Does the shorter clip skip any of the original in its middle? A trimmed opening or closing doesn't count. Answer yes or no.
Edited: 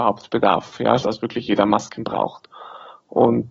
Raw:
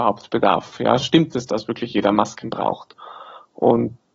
yes